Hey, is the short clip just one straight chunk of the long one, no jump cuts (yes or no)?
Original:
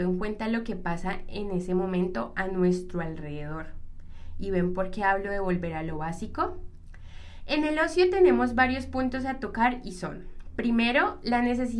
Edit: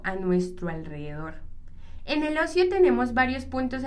no